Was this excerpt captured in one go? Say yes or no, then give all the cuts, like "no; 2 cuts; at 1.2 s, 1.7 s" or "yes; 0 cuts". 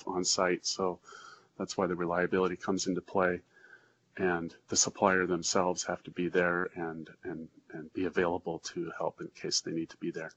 yes; 0 cuts